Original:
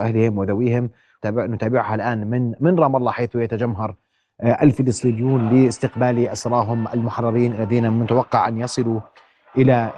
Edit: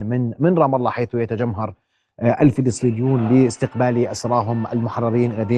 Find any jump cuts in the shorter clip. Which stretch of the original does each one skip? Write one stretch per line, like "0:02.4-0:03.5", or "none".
none

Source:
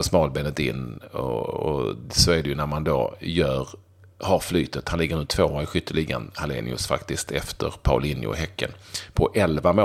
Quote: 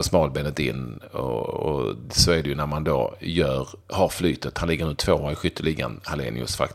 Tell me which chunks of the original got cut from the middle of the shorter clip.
0:03.8-0:04.1

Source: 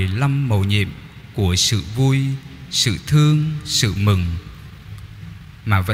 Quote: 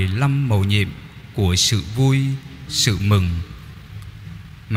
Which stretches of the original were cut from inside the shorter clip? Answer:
0:02.7-0:03.6

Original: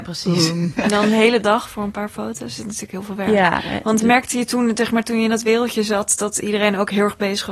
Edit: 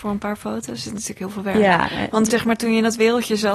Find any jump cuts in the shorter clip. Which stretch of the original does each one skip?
0:04.0-0:04.7

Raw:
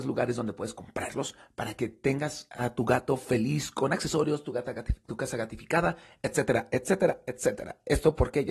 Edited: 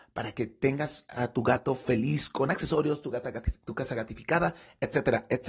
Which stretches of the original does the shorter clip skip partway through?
none

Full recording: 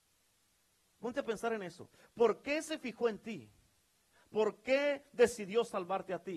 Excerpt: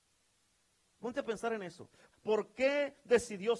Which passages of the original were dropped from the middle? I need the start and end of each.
0:02.1-0:04.2

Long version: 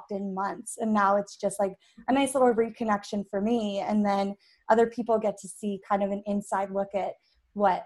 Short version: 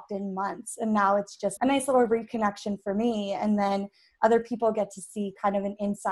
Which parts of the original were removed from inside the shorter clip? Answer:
0:01.6-0:02.0

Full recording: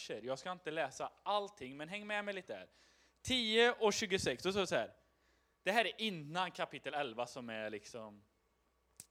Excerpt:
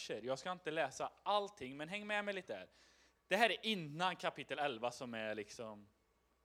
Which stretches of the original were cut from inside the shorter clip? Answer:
0:03.2-0:05.5

